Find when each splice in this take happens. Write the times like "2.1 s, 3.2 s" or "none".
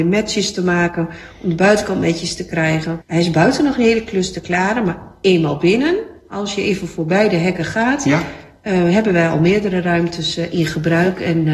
3.0 s